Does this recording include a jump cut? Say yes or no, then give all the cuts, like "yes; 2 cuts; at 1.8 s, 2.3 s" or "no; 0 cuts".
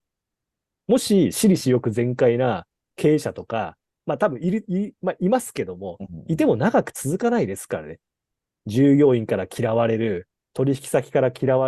no; 0 cuts